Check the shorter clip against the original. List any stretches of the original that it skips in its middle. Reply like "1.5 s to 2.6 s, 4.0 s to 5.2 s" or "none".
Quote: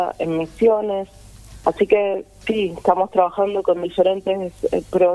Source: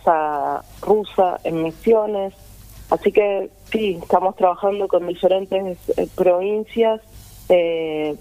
none